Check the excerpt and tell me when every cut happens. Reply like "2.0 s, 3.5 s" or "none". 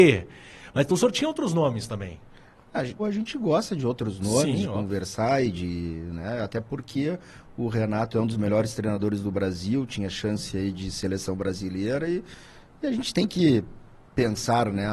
3.0 s